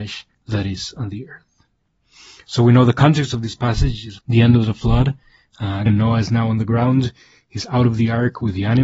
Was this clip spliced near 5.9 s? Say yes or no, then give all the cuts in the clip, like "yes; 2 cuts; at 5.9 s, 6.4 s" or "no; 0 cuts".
yes; 2 cuts; at 4.2 s, 5.9 s